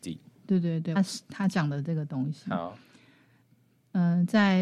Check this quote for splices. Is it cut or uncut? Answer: cut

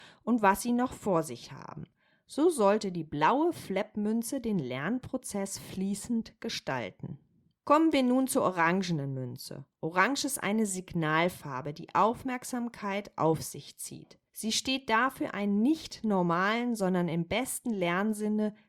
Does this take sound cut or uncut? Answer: uncut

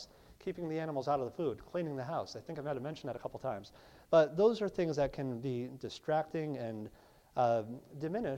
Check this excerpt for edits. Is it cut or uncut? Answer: uncut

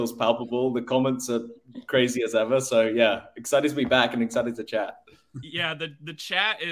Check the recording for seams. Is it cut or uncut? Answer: uncut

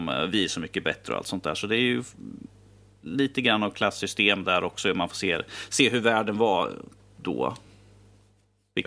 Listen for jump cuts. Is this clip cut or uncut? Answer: uncut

